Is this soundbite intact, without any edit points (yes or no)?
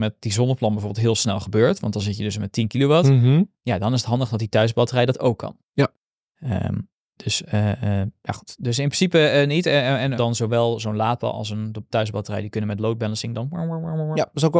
no